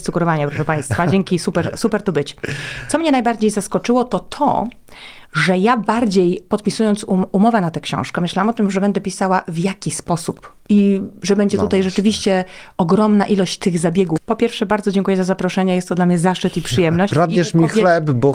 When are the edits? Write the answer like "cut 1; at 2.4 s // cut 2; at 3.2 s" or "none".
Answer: cut 1; at 14.2 s // cut 2; at 17.1 s